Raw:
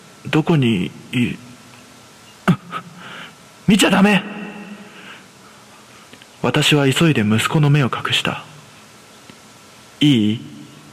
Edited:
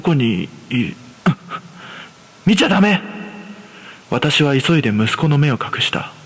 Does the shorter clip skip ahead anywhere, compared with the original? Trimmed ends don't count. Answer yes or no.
yes